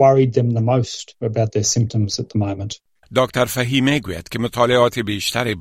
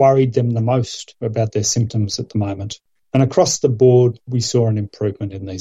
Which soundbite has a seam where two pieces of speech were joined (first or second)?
first